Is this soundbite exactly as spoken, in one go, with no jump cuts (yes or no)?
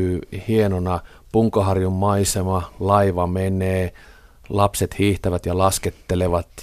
yes